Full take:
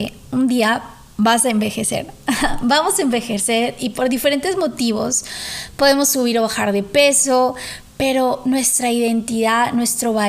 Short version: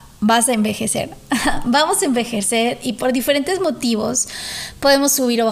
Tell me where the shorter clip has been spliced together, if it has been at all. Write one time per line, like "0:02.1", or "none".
none